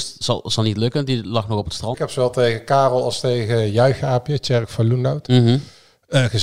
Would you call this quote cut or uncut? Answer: cut